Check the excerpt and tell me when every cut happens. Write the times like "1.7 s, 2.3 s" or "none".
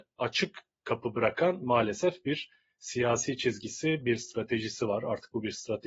4.0 s